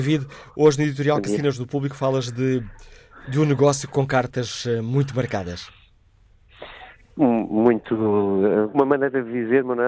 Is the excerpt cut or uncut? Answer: uncut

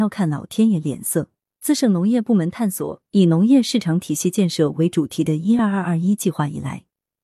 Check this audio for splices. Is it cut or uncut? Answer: uncut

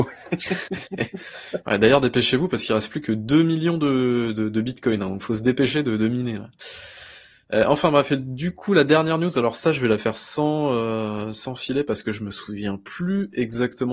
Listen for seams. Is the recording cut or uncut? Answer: uncut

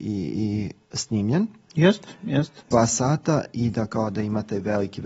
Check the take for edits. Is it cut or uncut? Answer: cut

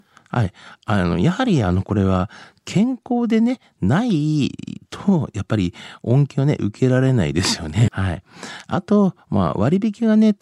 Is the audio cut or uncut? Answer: cut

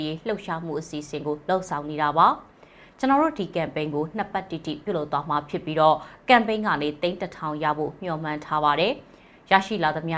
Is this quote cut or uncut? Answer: uncut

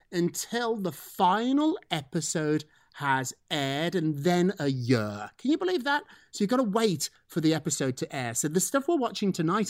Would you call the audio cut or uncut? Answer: uncut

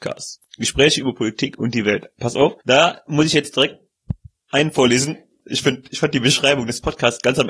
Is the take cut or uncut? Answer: cut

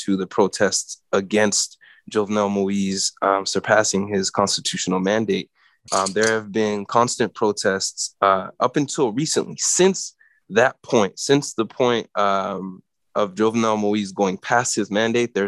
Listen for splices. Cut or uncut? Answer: cut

